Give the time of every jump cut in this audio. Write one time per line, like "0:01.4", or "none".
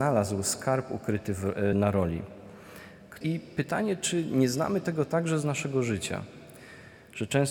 0:01.7
0:03.2